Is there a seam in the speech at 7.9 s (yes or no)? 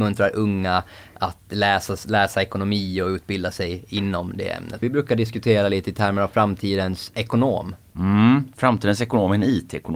yes